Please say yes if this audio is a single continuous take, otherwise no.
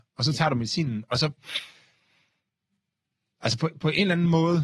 yes